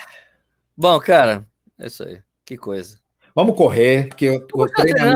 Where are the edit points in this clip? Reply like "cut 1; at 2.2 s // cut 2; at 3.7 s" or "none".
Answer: cut 1; at 4.1 s